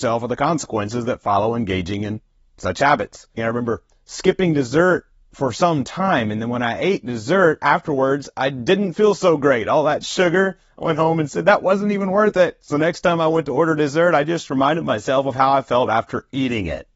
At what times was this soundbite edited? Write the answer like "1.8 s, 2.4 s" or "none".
3.4 s